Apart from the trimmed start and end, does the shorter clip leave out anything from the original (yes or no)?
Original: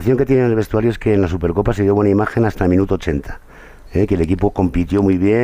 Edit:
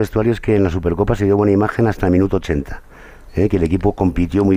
no